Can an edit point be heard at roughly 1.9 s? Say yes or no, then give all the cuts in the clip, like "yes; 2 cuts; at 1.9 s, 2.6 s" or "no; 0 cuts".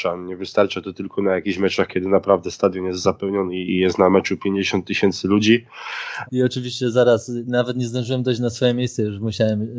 no; 2 cuts; at 3.7 s, 6.3 s